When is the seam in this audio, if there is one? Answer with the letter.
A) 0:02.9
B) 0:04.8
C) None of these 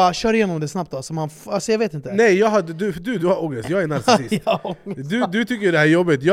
C